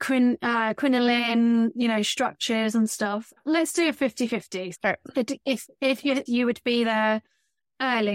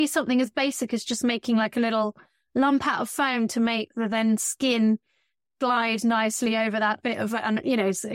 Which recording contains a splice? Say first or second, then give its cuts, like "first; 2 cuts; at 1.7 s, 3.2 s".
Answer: first; 2 cuts; at 4.7 s, 6.3 s